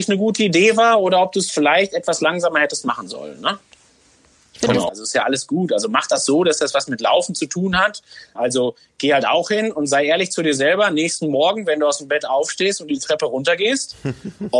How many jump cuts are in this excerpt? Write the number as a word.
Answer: two